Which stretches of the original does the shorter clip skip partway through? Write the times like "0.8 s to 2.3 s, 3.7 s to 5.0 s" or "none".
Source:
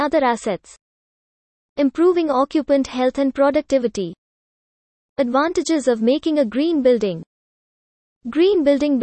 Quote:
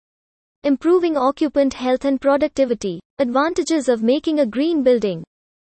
4.2 s to 5.1 s